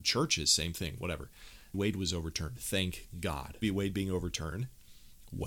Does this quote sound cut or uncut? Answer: cut